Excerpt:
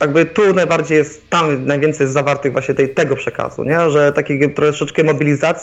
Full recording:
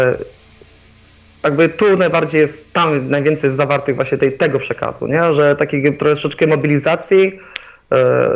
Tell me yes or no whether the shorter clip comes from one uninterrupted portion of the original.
yes